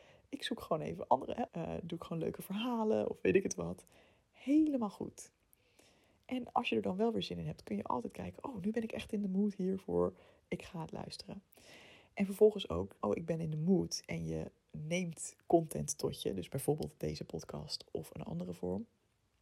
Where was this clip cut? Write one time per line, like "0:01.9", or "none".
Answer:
0:01.5
0:13.0